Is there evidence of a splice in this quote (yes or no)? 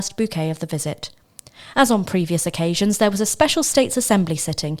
no